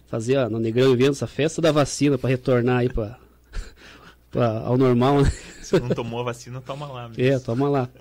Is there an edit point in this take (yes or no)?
no